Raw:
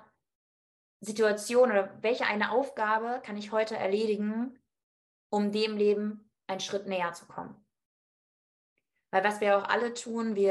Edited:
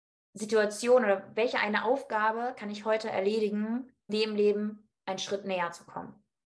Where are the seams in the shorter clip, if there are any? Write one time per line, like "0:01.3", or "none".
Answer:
0:04.1